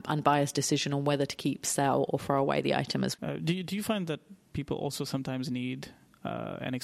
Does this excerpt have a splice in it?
yes; 1 cut; at 3.1 s

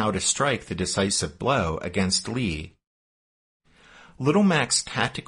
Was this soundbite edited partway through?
no; 0 cuts

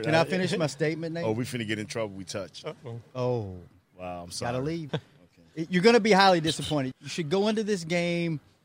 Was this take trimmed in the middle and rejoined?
yes; 2 cuts; at 4.9 s, 6.9 s

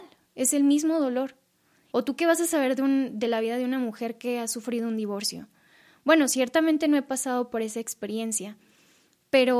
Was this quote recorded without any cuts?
no; 1 cut; at 1.9 s

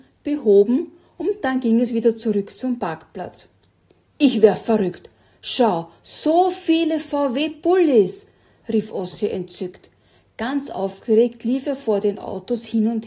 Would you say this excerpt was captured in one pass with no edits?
yes; 0 cuts

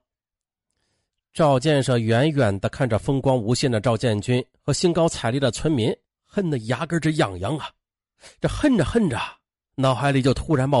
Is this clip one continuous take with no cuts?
yes; 0 cuts

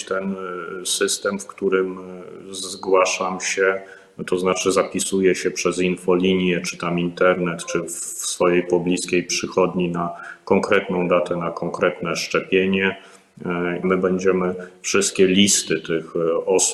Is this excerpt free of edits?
no; 1 cut; at 13.8 s

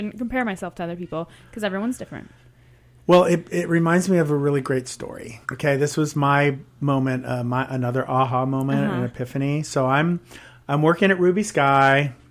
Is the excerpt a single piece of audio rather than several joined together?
no; 1 cut; at 5.4 s

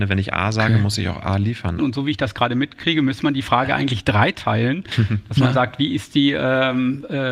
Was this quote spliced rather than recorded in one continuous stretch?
yes; 1 cut; at 1.8 s

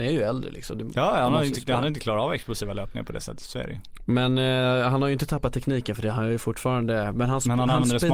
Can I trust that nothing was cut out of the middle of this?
yes; 0 cuts

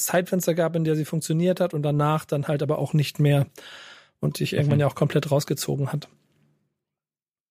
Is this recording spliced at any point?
no; 0 cuts

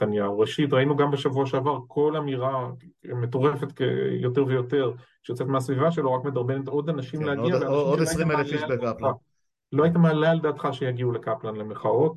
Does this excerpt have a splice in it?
no; 0 cuts

